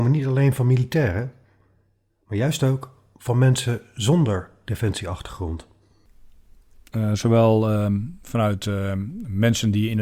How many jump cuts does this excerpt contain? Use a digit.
1